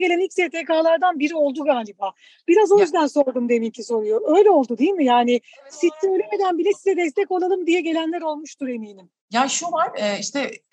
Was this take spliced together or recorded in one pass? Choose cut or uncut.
cut